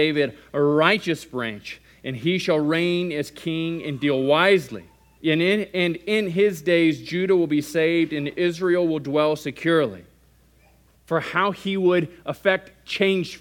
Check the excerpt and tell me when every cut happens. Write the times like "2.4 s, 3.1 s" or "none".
5.2 s, 10.9 s